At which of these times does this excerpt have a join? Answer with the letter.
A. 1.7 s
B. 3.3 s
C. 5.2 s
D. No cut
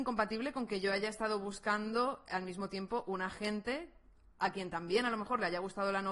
D